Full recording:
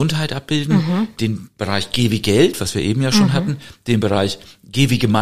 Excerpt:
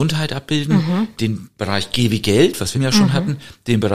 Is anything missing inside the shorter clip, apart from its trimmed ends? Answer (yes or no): yes